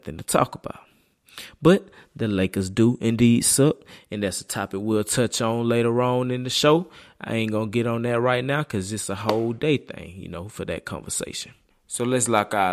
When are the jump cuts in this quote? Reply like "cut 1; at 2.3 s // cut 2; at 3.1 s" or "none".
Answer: none